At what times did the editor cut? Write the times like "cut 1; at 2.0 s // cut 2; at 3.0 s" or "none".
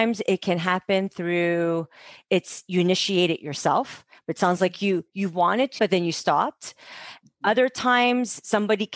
cut 1; at 5.8 s